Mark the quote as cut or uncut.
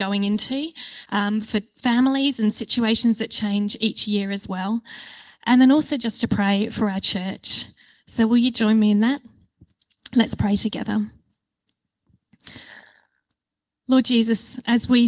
uncut